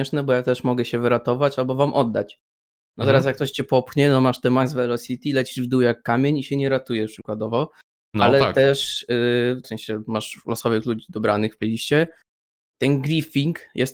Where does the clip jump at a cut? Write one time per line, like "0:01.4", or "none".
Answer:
0:09.6